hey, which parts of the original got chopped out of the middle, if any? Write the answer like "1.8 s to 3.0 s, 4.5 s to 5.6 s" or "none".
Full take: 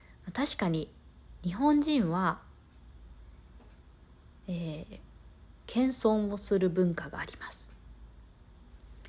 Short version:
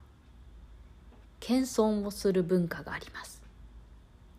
3.7 s to 5.5 s